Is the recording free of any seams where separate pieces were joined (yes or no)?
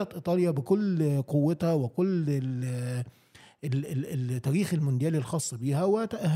yes